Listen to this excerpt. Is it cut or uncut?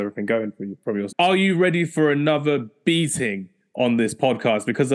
cut